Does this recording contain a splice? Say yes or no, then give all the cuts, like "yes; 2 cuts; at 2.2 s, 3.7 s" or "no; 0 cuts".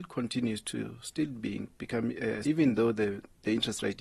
yes; 1 cut; at 2.4 s